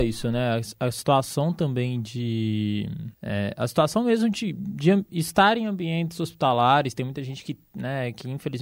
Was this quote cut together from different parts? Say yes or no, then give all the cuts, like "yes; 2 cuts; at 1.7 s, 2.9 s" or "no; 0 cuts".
yes; 1 cut; at 3.1 s